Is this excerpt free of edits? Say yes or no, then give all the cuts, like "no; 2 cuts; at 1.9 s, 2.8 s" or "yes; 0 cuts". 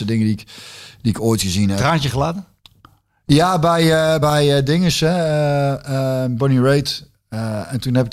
yes; 0 cuts